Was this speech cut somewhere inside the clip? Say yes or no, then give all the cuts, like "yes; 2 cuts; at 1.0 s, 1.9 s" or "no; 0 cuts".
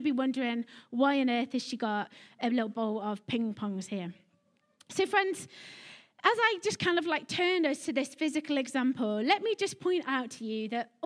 no; 0 cuts